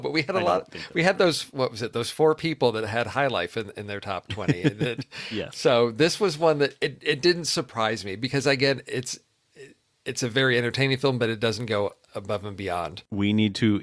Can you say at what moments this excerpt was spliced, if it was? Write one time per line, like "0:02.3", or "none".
none